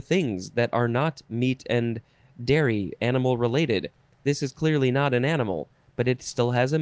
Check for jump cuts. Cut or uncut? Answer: uncut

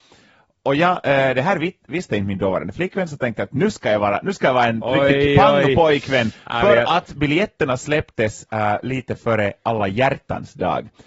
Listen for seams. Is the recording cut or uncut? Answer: uncut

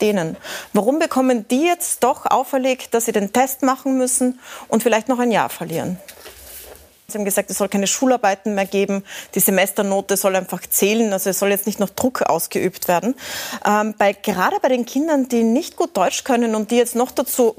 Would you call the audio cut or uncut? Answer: cut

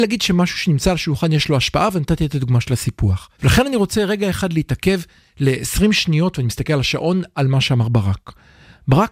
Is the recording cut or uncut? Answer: cut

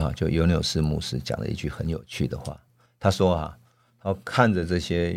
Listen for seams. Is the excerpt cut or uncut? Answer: uncut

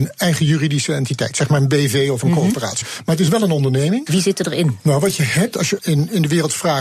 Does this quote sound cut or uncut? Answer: cut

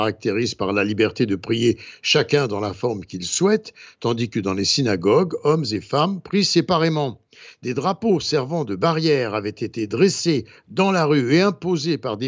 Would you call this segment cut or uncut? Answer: uncut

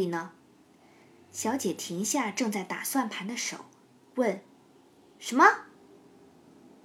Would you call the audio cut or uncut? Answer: uncut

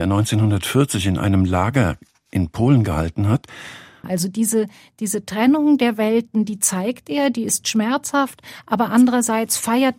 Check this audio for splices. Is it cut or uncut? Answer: cut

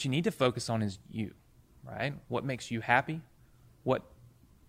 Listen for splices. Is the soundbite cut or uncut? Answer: uncut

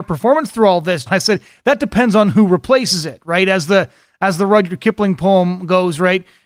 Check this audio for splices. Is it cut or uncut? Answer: cut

